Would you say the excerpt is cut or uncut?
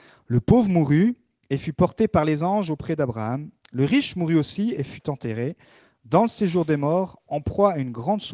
uncut